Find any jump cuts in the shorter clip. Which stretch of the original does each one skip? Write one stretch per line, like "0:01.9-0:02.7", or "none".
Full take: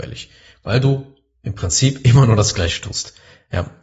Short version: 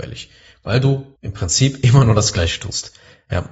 0:01.2-0:01.4